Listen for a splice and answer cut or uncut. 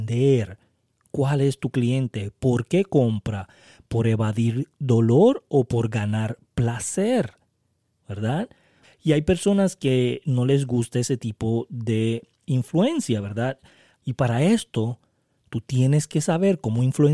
cut